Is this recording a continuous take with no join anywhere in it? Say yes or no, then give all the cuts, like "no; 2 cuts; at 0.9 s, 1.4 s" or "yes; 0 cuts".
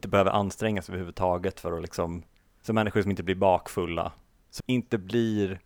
no; 1 cut; at 4.6 s